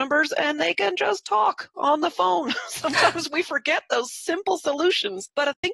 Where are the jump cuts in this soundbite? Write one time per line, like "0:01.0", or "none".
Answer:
none